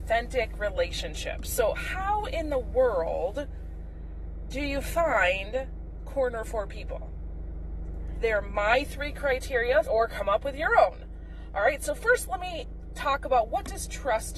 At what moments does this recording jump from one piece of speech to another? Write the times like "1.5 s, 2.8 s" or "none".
8.2 s, 9.8 s